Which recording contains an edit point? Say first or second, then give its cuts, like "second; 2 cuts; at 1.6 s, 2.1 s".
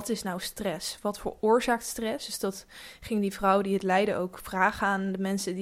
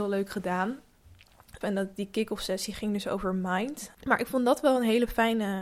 second; 2 cuts; at 1.6 s, 3.9 s